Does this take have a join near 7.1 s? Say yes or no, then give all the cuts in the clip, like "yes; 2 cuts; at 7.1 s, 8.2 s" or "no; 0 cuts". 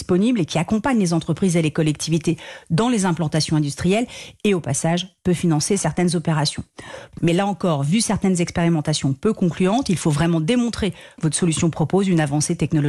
yes; 2 cuts; at 7.1 s, 11.2 s